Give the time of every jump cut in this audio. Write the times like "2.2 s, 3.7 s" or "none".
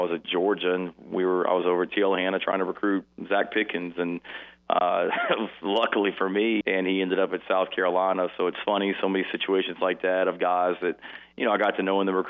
6.6 s